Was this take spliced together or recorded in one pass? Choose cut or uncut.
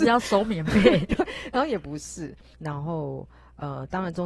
cut